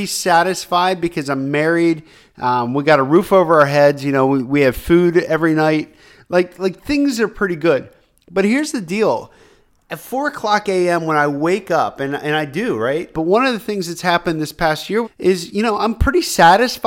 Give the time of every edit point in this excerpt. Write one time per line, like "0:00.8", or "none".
0:13.1
0:15.0

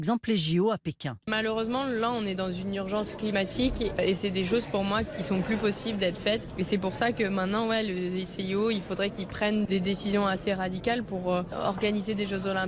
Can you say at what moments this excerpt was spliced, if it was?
none

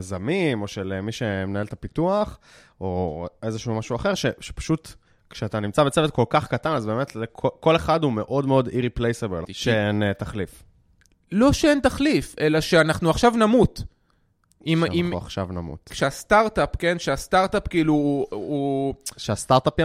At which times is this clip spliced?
0:09.4

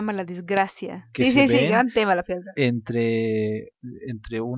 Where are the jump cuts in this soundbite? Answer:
0:01.1

